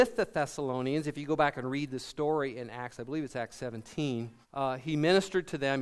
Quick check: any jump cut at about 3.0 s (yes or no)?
no